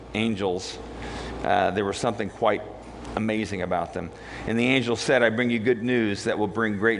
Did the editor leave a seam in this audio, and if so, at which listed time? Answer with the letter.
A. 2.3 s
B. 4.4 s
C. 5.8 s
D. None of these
D